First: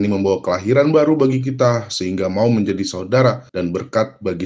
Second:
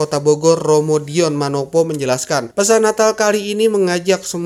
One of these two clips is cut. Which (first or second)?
first